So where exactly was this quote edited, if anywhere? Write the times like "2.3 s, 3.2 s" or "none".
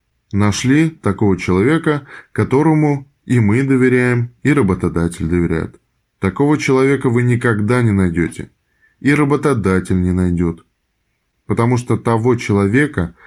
6.0 s